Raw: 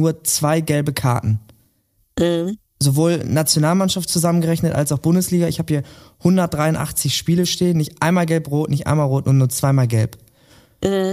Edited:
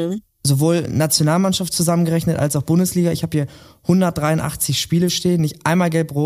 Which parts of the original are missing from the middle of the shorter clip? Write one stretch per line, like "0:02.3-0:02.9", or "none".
none